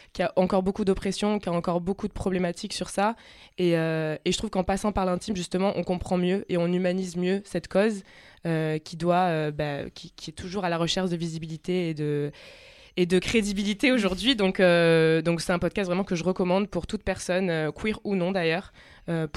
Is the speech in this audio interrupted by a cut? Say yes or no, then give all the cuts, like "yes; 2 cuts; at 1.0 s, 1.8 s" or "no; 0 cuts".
no; 0 cuts